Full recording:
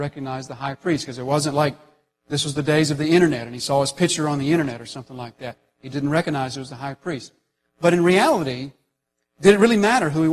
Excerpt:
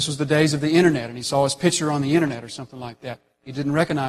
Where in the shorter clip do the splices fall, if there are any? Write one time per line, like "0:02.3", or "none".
none